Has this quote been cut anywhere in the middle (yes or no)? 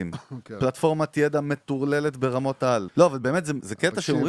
yes